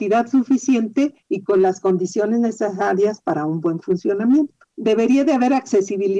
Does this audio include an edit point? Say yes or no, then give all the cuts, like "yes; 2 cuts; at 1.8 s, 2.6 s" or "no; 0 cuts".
yes; 1 cut; at 4.7 s